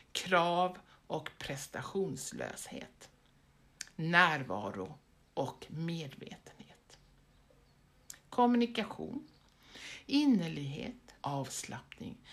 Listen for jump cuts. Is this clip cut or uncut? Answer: cut